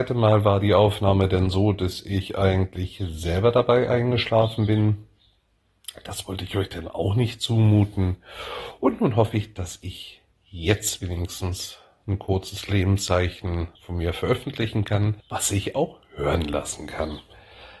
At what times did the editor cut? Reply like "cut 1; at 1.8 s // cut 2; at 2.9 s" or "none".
cut 1; at 13.8 s // cut 2; at 15.2 s